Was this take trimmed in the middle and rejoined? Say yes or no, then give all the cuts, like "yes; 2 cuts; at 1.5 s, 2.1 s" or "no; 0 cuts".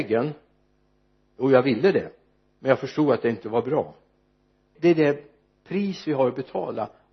yes; 1 cut; at 4.8 s